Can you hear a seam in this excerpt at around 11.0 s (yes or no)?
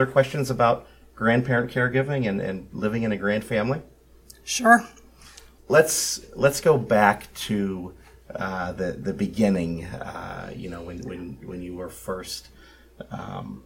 no